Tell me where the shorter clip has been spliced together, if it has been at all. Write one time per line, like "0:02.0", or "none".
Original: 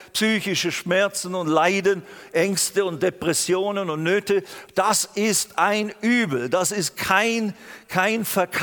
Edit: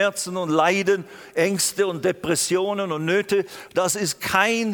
0:03.7